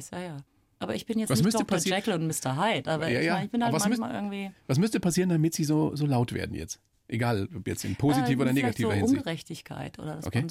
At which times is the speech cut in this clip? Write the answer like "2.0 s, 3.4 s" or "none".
none